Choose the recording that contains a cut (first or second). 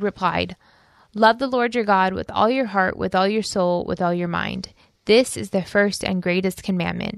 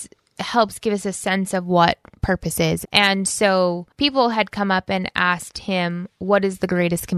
second